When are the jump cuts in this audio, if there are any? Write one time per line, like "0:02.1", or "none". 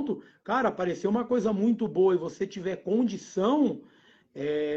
none